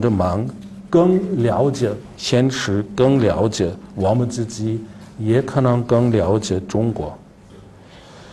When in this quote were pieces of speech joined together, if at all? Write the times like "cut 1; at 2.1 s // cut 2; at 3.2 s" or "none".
none